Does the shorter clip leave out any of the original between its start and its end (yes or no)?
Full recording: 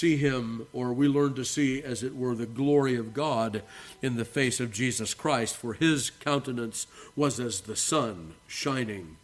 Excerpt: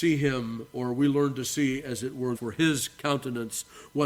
yes